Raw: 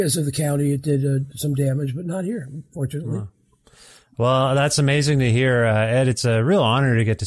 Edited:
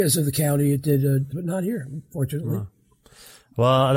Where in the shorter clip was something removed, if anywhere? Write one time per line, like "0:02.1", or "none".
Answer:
0:01.3